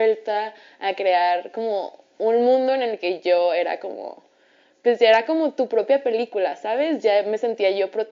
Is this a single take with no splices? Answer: yes; 0 cuts

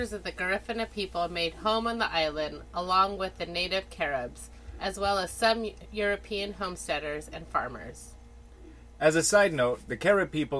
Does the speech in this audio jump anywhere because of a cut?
no; 0 cuts

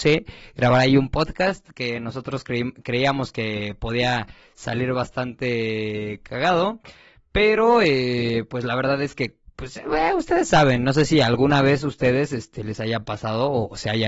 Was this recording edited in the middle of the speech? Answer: no; 0 cuts

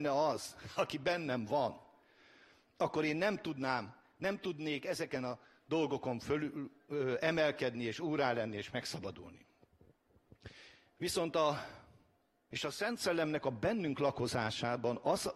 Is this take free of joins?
no; 1 cut; at 12.5 s

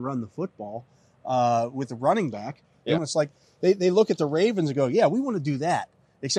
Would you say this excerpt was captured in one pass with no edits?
no; 1 cut; at 3.0 s

